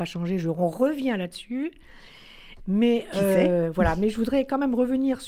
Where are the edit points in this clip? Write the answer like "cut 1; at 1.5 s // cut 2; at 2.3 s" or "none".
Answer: cut 1; at 2.6 s